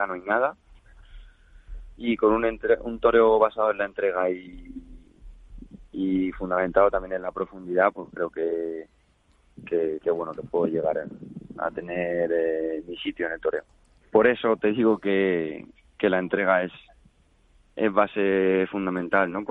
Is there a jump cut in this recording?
yes; 1 cut; at 14.0 s

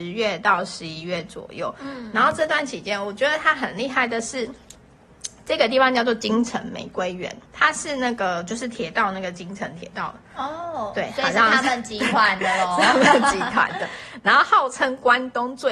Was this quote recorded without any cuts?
no; 1 cut; at 7.5 s

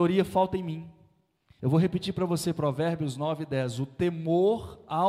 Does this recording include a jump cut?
yes; 1 cut; at 1.6 s

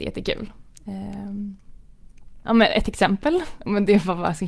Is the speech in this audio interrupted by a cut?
yes; 2 cuts; at 2.4 s, 3.6 s

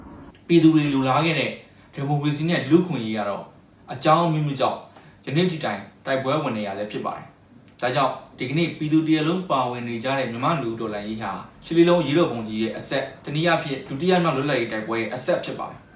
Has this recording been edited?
yes; 2 cuts; at 11.6 s, 13.2 s

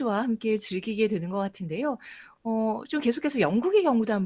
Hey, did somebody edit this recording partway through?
no; 0 cuts

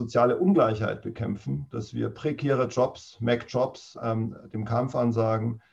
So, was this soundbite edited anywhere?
yes; 1 cut; at 4.0 s

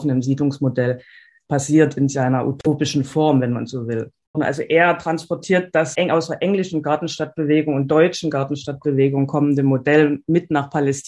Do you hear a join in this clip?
yes; 2 cuts; at 4.3 s, 5.9 s

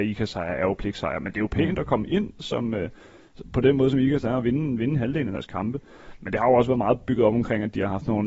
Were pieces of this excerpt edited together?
no; 0 cuts

